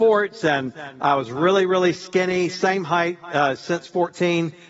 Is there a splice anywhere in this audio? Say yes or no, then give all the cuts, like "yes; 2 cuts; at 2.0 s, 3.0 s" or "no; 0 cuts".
no; 0 cuts